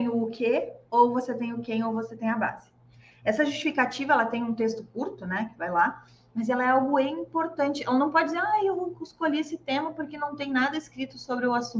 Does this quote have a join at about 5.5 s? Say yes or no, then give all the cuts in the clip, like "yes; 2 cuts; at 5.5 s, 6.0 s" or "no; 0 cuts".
no; 0 cuts